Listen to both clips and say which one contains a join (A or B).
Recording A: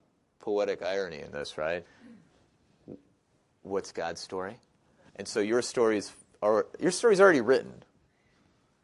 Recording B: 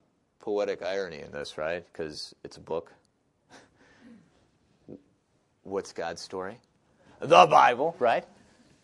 A